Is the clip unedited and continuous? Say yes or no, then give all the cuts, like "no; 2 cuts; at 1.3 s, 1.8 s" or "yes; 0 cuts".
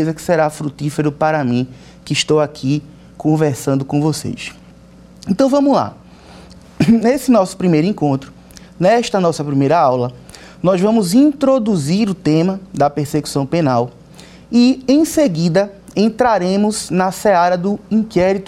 yes; 0 cuts